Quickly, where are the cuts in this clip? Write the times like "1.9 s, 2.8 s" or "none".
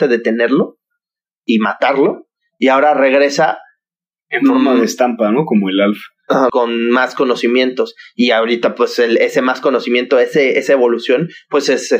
6.5 s

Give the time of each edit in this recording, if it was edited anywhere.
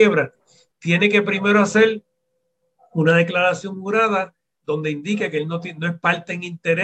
none

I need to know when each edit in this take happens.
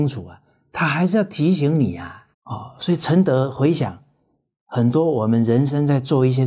2.3 s

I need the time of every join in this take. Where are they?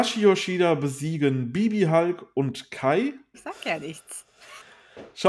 3.3 s

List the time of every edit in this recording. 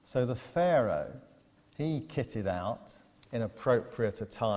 1.6 s

